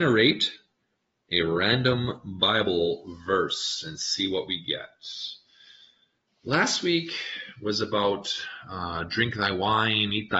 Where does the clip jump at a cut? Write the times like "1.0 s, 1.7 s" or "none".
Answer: none